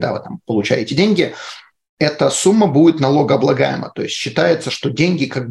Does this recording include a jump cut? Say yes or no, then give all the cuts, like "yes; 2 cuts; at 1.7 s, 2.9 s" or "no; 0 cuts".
no; 0 cuts